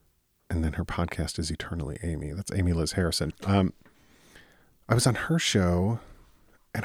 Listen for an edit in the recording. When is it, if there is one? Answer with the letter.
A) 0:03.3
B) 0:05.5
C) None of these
A